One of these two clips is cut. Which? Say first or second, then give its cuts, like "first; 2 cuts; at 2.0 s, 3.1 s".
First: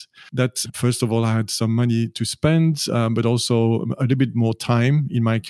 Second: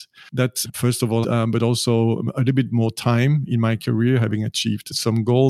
second; 1 cut; at 1.2 s